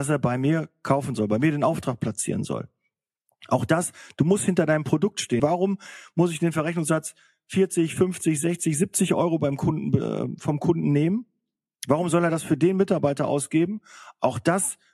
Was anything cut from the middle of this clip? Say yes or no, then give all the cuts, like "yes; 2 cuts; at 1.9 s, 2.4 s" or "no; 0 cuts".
yes; 1 cut; at 5.4 s